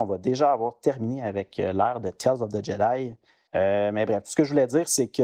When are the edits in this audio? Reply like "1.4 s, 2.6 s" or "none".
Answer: 3.5 s